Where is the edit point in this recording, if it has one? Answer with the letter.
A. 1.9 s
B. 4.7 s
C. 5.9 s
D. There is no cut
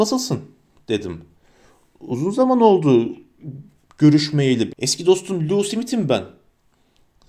B